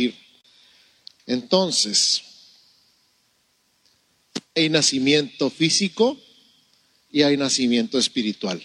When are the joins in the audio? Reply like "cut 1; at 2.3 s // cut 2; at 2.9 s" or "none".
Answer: cut 1; at 1.2 s